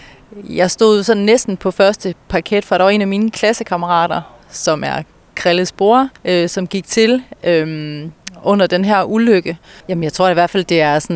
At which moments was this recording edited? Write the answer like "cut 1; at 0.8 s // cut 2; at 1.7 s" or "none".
cut 1; at 6.2 s // cut 2; at 9.8 s

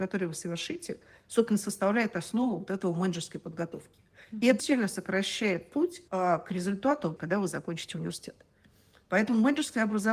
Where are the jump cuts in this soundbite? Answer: cut 1; at 4.6 s // cut 2; at 6.1 s // cut 3; at 7.2 s

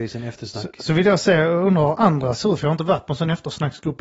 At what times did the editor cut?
none

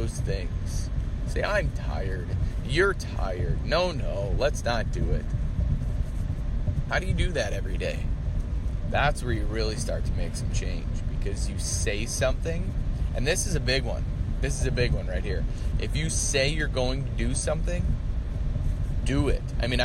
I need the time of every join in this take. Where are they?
cut 1; at 6.9 s // cut 2; at 8.9 s

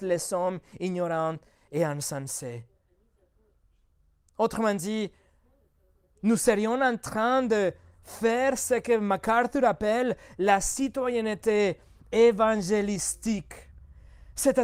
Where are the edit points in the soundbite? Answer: none

